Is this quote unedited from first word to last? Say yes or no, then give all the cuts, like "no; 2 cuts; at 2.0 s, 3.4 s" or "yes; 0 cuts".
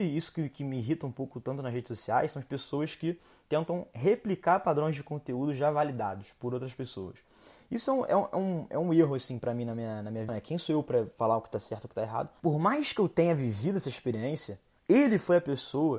no; 3 cuts; at 10.3 s, 12.4 s, 14.8 s